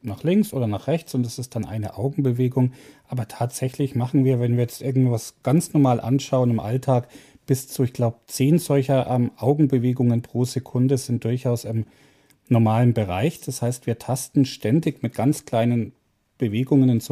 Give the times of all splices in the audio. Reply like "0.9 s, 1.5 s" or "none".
none

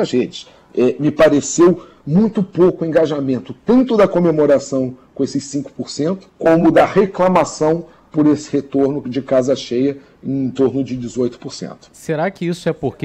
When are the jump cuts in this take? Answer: 6.3 s

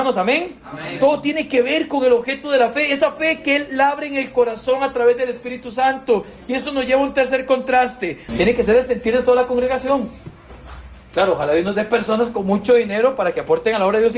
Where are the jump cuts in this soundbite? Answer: 8.3 s

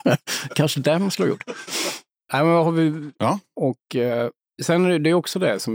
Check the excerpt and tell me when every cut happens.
3.2 s

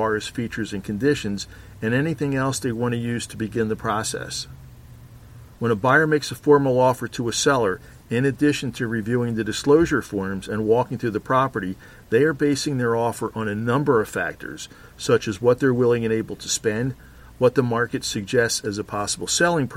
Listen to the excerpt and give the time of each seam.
5.5 s

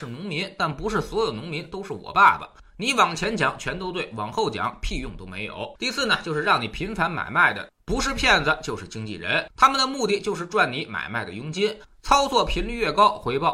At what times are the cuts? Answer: 5.8 s

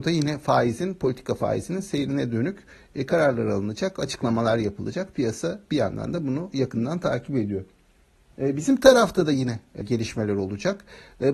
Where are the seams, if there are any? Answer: 8.3 s, 9.8 s

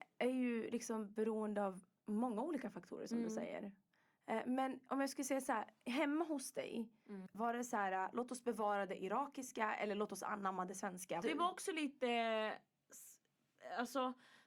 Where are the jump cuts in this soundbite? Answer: 7.3 s, 11.2 s

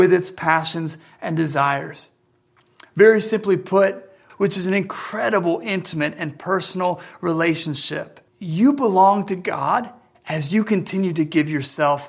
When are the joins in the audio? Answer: 4.3 s, 8.3 s

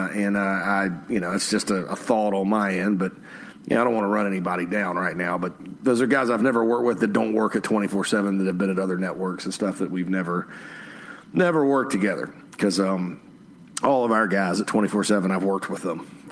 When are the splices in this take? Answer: none

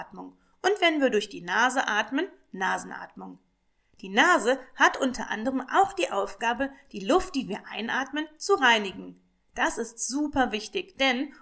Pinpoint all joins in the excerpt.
none

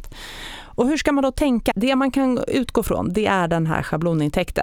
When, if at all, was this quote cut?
1.7 s

